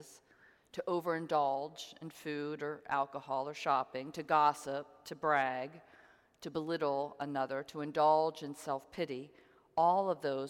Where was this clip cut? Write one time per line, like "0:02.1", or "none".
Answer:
none

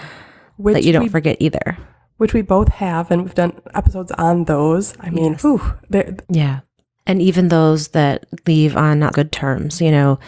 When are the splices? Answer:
0:06.2
0:09.1

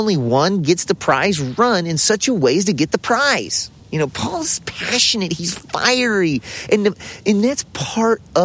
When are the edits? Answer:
0:03.8

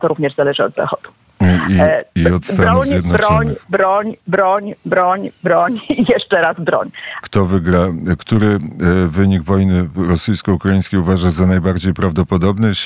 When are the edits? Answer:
0:07.2

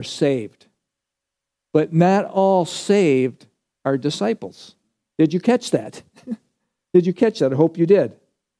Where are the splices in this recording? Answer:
none

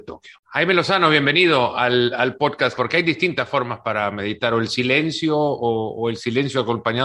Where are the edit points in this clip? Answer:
0:02.8

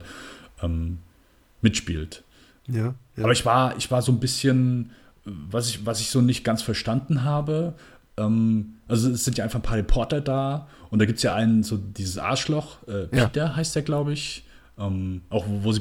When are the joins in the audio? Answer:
none

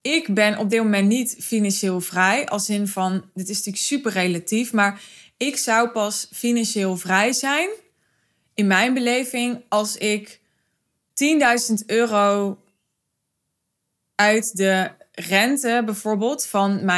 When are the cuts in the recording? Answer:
none

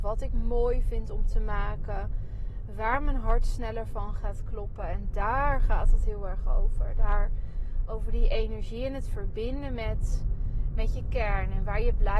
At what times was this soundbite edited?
none

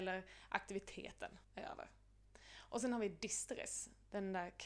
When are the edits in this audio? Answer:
0:01.4

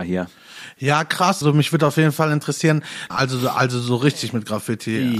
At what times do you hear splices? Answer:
0:01.4
0:03.1

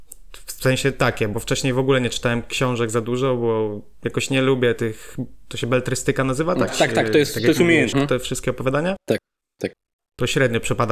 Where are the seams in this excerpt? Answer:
0:06.7
0:07.9

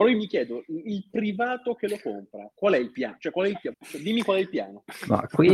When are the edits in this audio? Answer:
0:03.7

